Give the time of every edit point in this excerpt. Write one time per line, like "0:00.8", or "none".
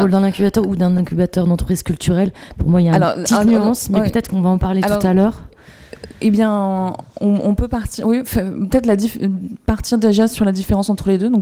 none